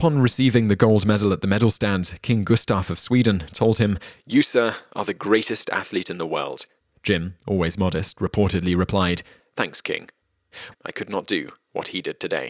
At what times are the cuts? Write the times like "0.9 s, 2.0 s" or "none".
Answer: 10.7 s